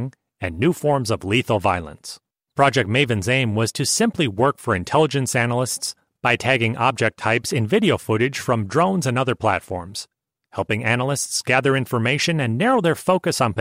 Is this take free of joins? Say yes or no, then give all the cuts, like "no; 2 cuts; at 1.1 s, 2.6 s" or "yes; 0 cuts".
no; 1 cut; at 2.4 s